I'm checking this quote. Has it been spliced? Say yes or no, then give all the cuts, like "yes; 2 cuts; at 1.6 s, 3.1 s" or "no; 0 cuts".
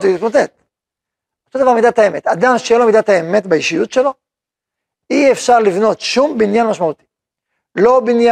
no; 0 cuts